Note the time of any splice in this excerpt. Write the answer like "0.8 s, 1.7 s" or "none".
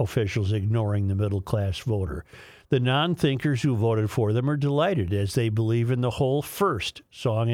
none

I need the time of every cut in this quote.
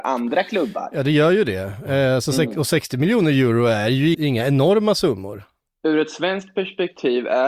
4.1 s, 5.7 s

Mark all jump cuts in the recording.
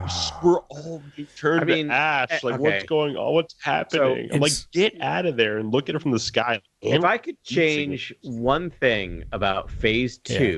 none

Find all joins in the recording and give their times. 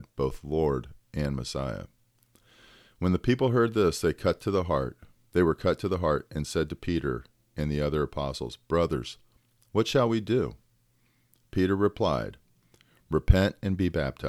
none

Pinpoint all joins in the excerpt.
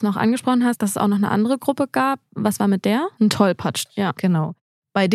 3.2 s

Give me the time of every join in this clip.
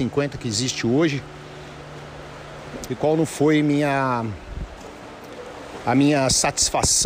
2.9 s

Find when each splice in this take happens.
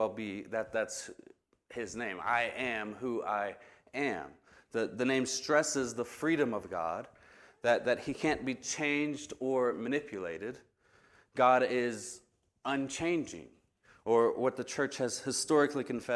none

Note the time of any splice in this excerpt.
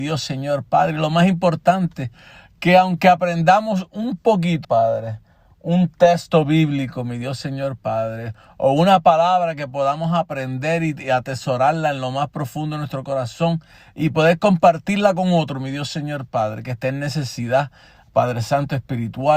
4.6 s

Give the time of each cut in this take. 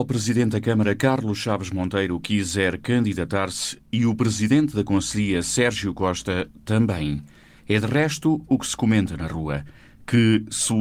none

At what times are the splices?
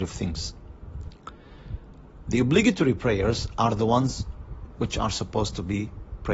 2.2 s

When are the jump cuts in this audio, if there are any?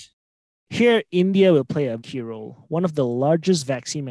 2.0 s

